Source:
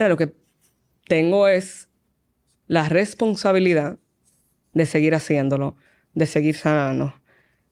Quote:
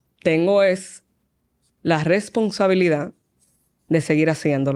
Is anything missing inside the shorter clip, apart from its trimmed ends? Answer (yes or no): no